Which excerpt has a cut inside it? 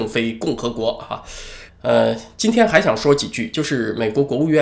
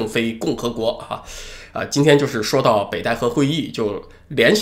first; 1 cut; at 1.7 s

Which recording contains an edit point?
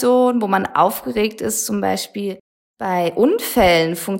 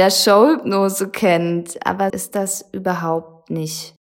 second; 1 cut; at 2.1 s

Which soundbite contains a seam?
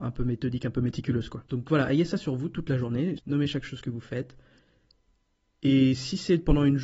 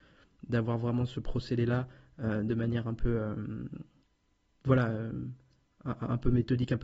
first; 2 cuts; at 1.5 s, 3.2 s

